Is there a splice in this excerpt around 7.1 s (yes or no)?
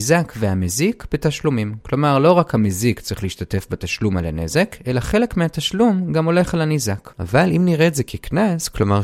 yes